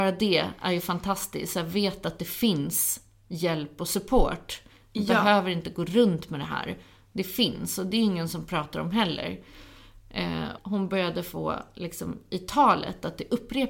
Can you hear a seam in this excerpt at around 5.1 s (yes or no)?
no